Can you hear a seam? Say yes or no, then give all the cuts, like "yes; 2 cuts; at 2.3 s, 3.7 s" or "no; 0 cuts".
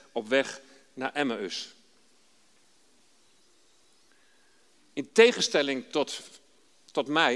no; 0 cuts